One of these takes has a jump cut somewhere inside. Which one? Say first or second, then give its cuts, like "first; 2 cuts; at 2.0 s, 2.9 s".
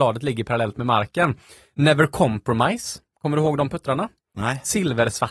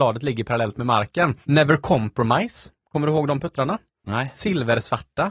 second; 1 cut; at 1.4 s